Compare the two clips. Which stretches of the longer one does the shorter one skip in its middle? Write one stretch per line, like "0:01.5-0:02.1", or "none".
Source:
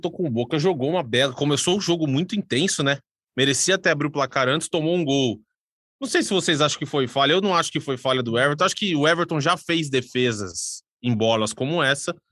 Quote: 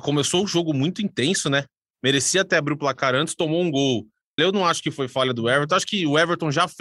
0:05.7-0:07.3